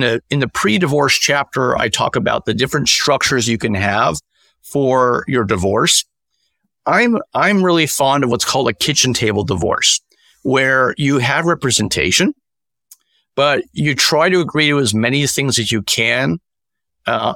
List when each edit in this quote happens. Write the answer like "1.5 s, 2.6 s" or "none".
none